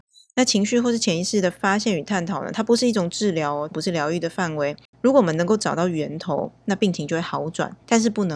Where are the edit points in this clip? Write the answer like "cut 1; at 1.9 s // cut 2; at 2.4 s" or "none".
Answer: cut 1; at 3.7 s // cut 2; at 4.9 s